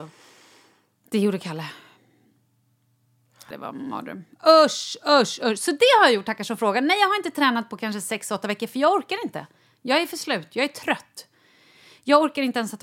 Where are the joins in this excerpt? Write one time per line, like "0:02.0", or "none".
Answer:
0:03.5